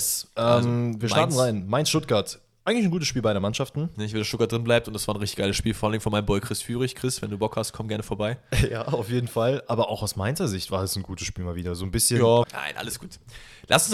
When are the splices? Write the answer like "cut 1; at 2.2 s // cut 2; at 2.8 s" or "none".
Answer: cut 1; at 3.9 s // cut 2; at 12.4 s